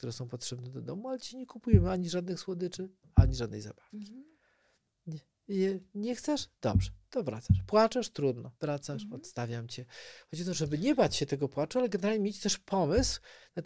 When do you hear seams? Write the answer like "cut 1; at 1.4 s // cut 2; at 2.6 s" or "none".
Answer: cut 1; at 8.6 s